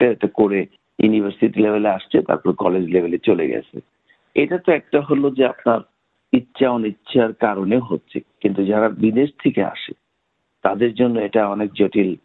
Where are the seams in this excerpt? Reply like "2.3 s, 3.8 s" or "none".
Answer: 8.2 s